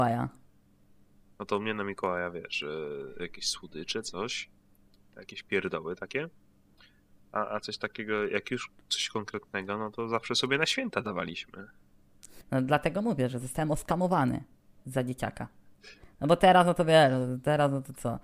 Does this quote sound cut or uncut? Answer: cut